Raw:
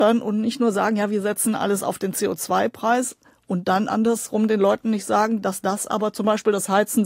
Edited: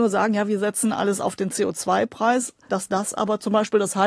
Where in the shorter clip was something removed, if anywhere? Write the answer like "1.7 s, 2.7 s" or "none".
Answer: 2.7 s

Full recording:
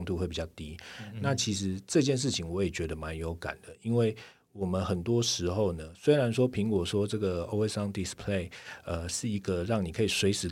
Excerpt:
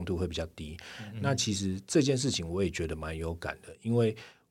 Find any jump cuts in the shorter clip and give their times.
none

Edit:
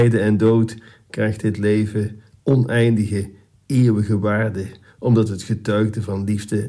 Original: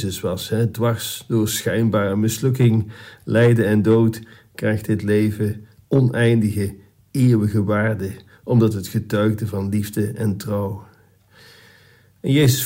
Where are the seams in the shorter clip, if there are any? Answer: none

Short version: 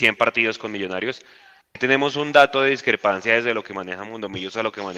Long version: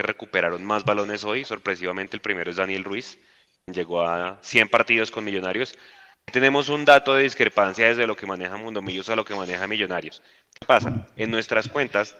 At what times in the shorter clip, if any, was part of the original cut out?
none

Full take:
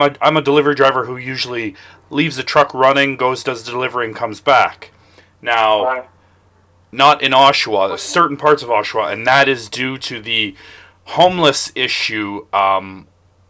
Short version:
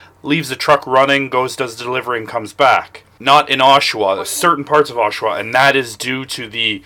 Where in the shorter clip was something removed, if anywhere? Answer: 3.2 s

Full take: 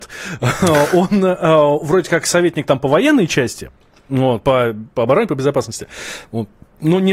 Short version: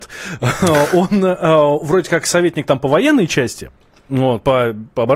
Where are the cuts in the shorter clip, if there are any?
none

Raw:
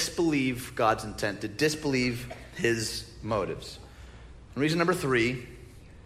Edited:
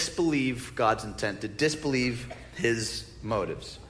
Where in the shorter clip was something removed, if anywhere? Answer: none

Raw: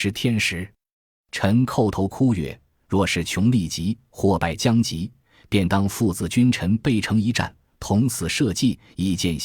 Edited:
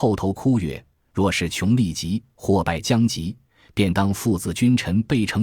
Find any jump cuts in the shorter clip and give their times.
none

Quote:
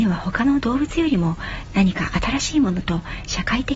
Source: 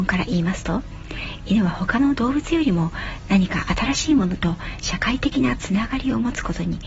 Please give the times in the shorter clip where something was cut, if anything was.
none

